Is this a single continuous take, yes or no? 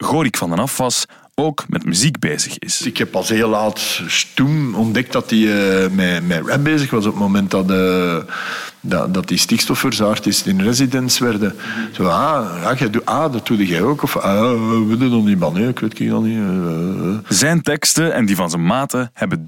no